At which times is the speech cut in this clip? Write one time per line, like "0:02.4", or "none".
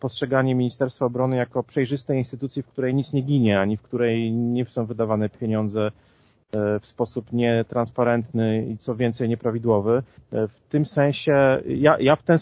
0:10.2